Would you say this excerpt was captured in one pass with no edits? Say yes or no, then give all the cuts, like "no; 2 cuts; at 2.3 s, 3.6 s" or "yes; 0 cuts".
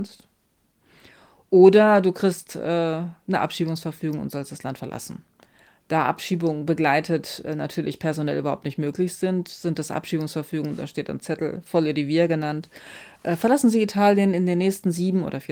yes; 0 cuts